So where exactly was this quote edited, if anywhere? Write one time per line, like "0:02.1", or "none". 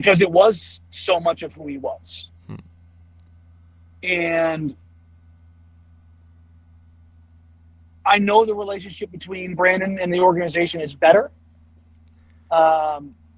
none